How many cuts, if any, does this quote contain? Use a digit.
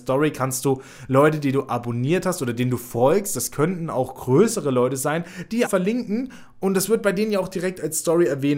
1